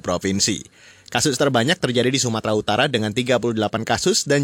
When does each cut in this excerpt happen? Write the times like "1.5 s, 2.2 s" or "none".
none